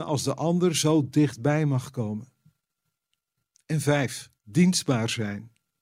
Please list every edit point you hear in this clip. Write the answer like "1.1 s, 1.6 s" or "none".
4.4 s

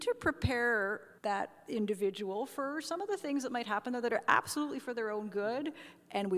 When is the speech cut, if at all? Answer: 1.2 s

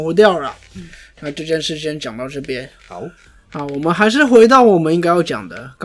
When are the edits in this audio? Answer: 2.8 s

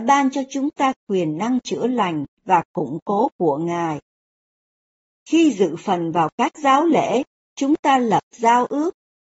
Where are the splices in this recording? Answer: none

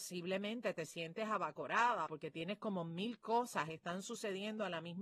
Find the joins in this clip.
2.1 s

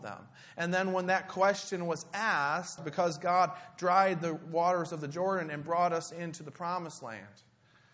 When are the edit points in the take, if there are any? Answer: 2.8 s

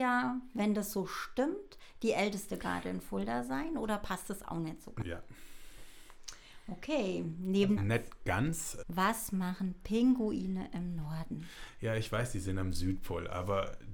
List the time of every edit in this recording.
5.0 s, 7.8 s, 8.8 s

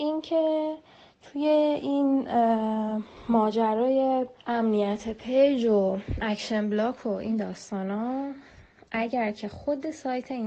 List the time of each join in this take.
4.4 s

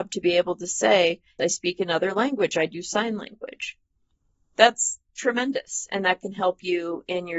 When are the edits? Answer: 1.4 s

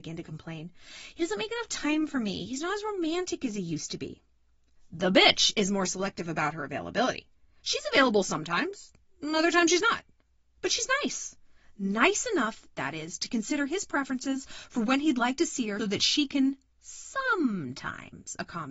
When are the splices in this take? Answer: 15.8 s

